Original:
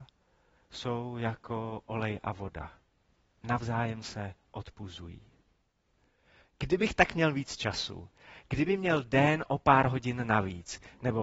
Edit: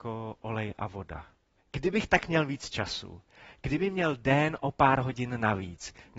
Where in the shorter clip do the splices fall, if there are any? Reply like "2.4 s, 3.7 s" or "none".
1.6 s